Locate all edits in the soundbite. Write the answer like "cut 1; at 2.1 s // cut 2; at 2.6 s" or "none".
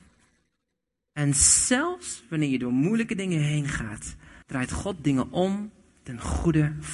cut 1; at 4.4 s